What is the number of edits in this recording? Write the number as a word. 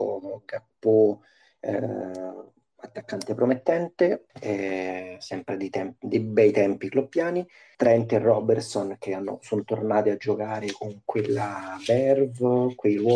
two